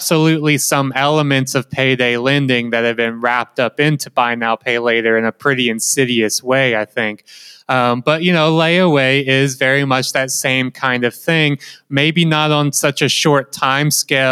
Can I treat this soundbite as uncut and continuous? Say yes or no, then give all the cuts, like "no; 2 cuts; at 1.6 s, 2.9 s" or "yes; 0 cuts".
yes; 0 cuts